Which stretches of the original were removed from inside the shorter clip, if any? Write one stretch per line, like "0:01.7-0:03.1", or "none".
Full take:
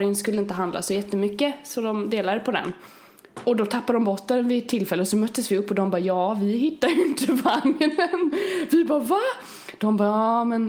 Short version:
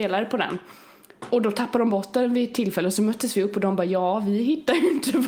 none